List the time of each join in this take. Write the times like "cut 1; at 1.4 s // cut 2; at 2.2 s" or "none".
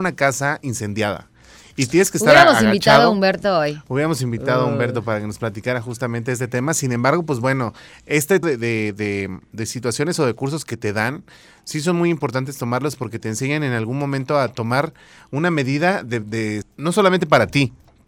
cut 1; at 8.4 s // cut 2; at 16.6 s